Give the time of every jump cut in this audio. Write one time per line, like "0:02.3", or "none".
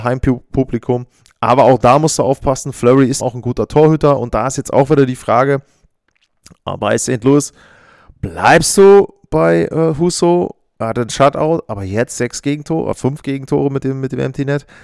0:03.2

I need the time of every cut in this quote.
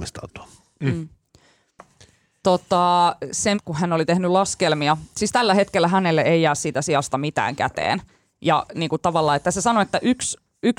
0:03.5

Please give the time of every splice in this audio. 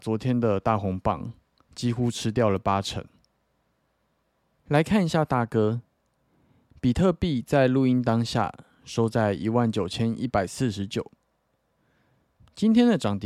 0:04.6

